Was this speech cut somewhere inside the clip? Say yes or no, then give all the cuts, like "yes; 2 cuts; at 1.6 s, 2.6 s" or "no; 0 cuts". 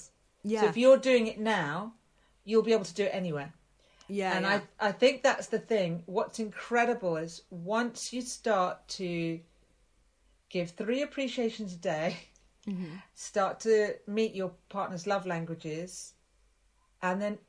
no; 0 cuts